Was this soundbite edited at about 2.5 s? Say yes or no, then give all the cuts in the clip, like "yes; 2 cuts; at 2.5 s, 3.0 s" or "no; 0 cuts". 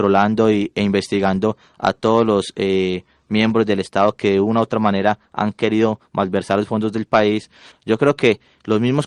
no; 1 cut; at 7.7 s